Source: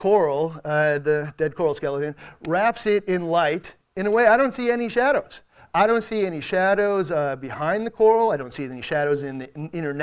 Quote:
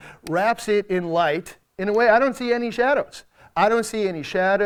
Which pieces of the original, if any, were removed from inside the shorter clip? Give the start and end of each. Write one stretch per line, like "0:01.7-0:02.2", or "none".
none